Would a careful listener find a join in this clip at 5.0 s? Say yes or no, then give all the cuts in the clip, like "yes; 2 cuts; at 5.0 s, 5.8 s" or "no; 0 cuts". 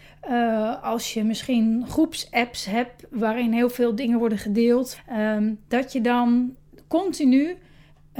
yes; 1 cut; at 5.0 s